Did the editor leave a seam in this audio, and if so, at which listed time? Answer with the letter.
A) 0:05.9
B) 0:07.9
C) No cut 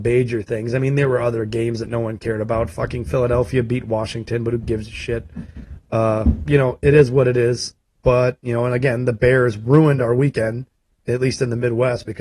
B